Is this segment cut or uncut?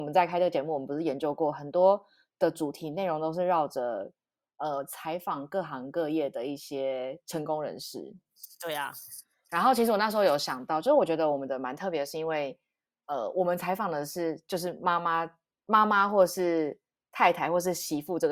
uncut